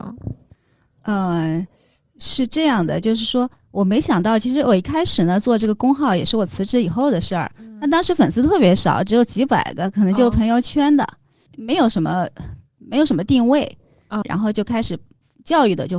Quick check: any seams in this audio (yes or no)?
yes